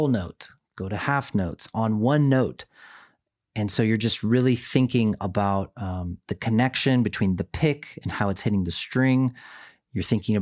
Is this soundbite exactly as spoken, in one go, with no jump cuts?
yes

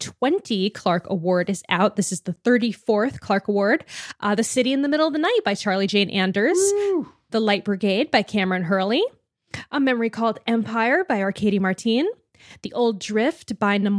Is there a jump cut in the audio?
no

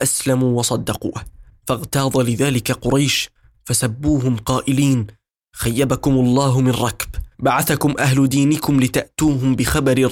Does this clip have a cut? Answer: no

